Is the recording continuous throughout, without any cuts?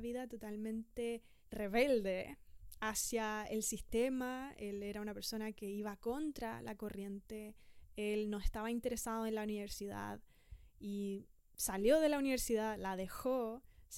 yes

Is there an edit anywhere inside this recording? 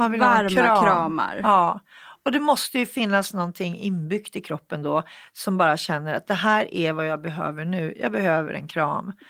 no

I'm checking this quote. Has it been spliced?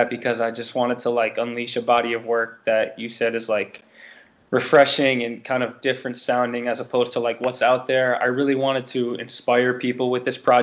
no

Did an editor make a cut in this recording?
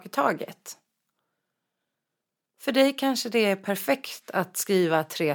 no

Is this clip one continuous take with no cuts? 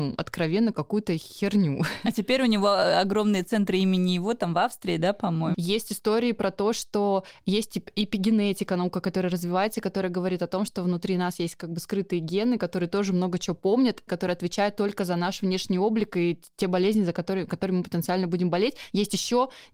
no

